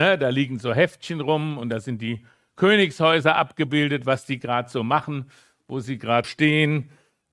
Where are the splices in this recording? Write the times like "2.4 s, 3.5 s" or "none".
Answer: 6.2 s